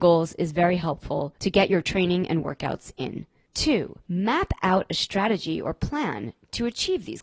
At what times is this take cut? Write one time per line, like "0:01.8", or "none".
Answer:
none